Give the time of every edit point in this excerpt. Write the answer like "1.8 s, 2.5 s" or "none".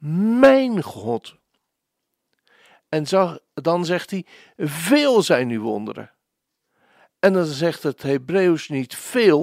none